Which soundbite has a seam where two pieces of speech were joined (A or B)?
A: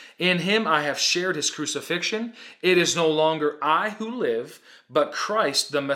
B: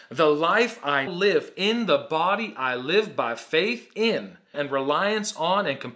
B